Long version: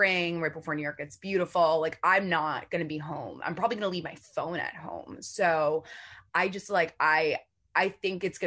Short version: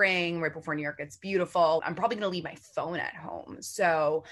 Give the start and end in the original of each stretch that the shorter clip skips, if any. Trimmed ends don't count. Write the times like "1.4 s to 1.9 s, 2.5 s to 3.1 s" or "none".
1.8 s to 3.4 s